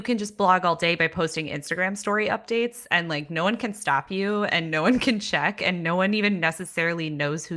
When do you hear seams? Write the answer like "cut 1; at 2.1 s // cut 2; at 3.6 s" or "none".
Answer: none